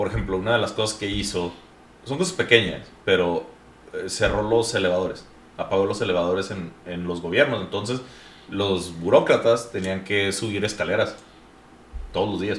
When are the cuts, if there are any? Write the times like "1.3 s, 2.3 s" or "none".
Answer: none